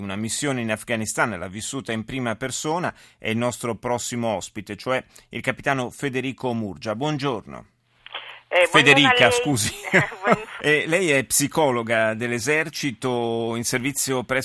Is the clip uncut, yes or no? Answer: no